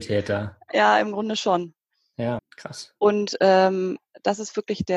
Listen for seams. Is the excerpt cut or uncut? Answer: cut